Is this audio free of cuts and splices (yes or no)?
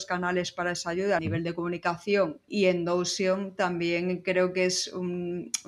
no